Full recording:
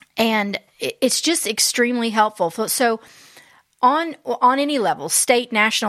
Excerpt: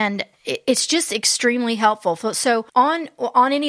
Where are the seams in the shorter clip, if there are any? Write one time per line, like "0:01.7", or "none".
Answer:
0:02.7